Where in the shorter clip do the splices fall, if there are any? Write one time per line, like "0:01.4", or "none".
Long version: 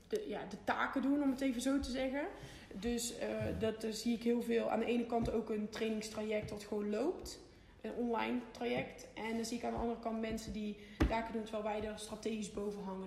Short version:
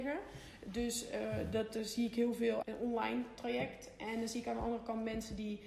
0:02.6